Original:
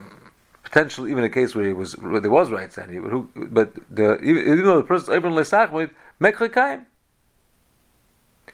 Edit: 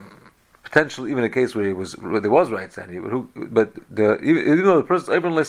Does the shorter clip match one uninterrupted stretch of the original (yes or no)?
yes